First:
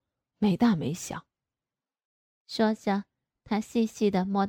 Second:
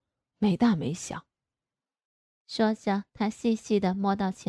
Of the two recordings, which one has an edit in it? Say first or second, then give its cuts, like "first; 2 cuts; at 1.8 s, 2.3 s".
second; 1 cut; at 3.1 s